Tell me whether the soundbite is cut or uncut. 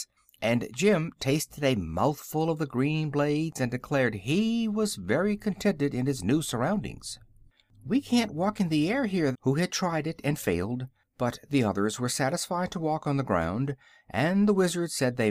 cut